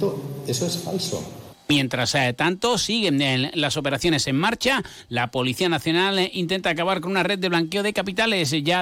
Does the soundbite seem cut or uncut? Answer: uncut